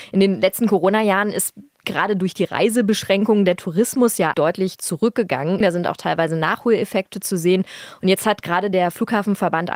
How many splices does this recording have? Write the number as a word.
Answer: two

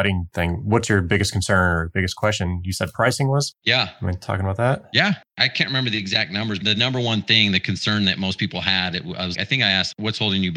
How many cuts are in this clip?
two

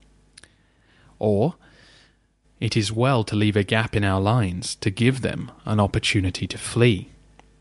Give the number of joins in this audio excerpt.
one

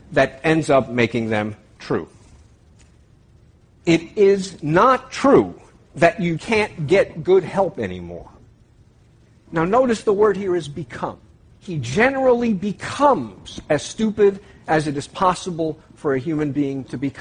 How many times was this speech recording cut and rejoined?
two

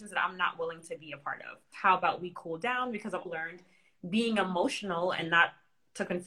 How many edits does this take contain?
two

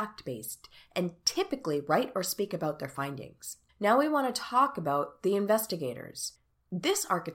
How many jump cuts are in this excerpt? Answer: one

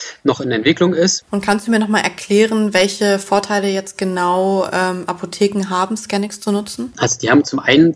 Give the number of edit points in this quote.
one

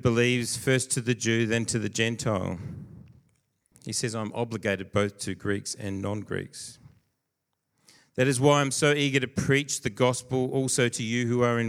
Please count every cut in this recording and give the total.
two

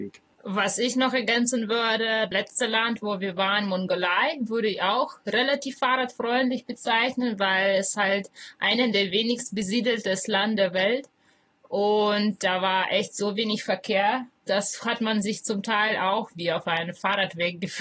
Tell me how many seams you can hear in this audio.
one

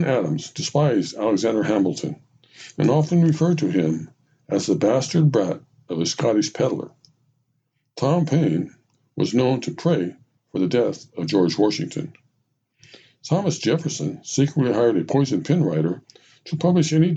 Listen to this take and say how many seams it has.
zero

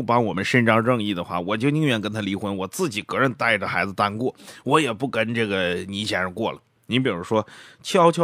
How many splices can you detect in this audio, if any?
one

